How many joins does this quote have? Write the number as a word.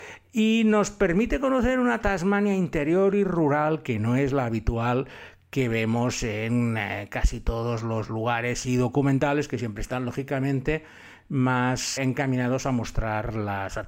one